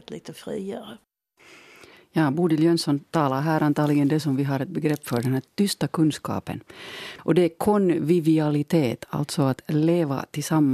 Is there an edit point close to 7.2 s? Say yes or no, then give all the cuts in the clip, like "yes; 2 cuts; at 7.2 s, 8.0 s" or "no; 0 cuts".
yes; 1 cut; at 7.2 s